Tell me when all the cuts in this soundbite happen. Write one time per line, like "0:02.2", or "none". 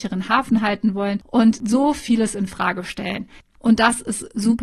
0:03.4